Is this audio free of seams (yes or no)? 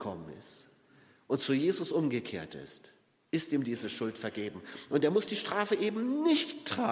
yes